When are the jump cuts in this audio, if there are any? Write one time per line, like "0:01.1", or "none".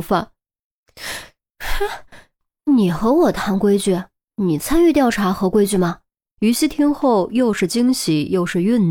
0:06.3